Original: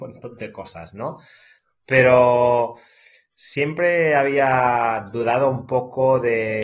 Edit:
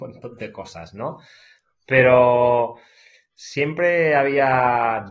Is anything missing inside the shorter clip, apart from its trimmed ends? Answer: no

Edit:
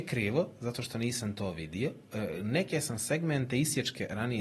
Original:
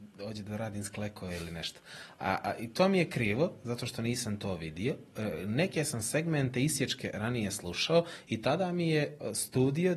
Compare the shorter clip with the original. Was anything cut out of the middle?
no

